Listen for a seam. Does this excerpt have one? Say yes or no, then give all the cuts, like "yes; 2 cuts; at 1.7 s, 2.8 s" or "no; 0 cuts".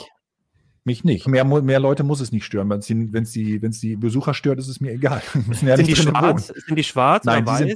yes; 1 cut; at 1.2 s